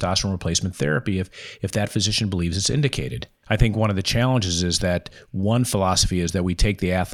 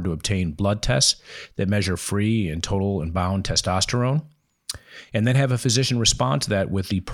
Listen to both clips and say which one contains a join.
first; 1 cut; at 3.4 s

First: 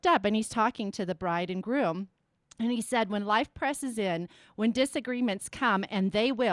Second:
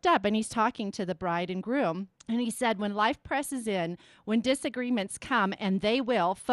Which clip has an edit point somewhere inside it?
second; 1 cut; at 2.1 s

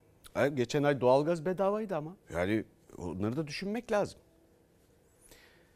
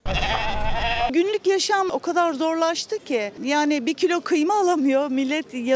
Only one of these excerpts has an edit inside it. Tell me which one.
first; 1 cut; at 2.2 s

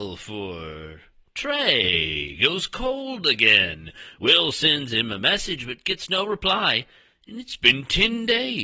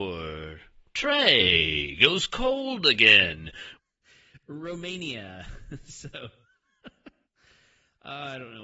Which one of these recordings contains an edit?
second; 1 cut; at 3.8 s

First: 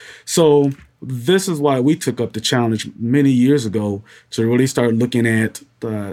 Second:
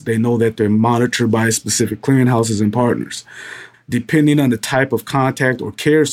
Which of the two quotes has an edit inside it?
second; 1 cut; at 3.7 s

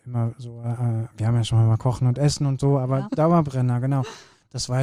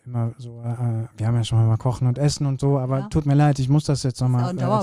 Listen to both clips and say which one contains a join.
first; 1 cut; at 3.1 s

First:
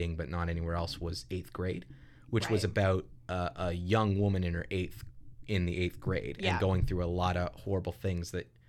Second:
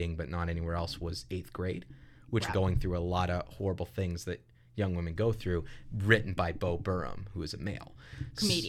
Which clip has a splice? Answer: second; 1 cut; at 2.5 s

